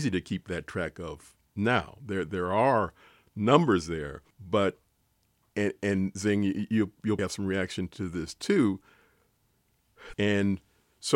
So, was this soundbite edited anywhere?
yes; 3 cuts; at 4.3 s, 7.2 s, 10.1 s

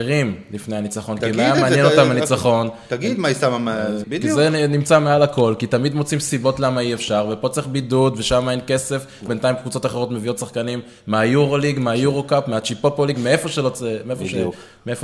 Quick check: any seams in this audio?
yes; 2 cuts; at 4.0 s, 9.3 s

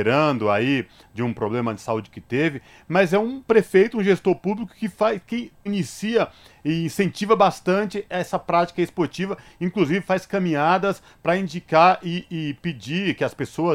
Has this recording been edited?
yes; 2 cuts; at 5.7 s, 12.3 s

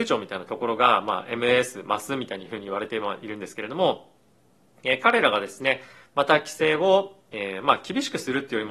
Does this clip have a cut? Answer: no; 0 cuts

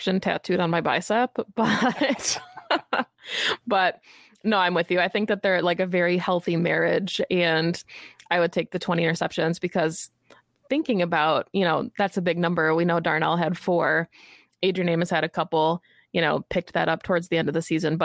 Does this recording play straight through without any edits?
yes; 0 cuts

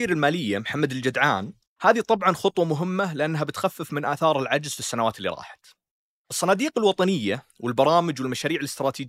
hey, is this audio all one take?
no; 1 cut; at 1.6 s

